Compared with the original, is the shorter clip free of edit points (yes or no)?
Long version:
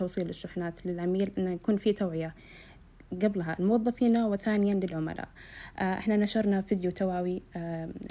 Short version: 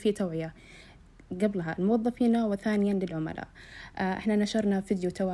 yes